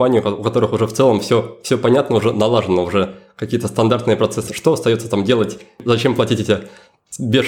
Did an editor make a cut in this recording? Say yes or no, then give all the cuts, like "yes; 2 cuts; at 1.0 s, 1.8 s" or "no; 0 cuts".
yes; 1 cut; at 4.5 s